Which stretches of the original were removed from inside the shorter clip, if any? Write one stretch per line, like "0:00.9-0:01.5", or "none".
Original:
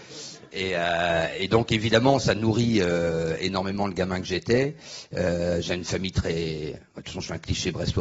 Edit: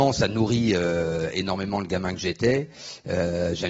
none